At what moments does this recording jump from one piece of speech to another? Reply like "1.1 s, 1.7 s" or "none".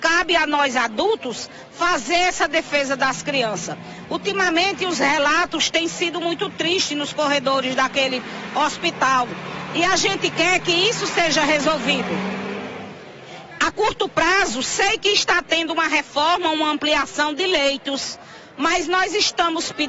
none